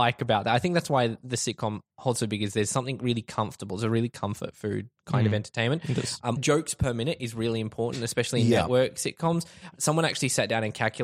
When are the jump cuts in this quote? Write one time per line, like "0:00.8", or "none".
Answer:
0:06.4